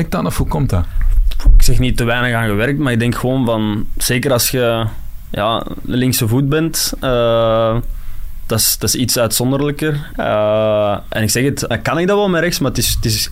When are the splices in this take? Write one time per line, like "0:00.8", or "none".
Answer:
0:10.1
0:11.7